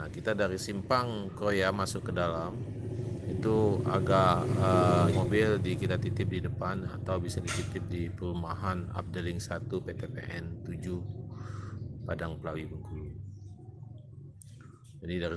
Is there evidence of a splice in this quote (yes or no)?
yes